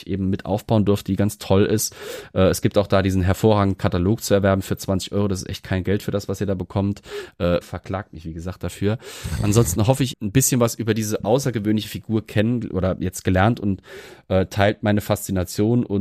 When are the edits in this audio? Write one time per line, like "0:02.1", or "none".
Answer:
0:07.6
0:10.1